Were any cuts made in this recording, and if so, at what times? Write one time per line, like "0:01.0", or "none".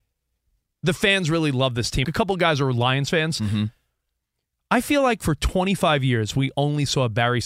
0:02.0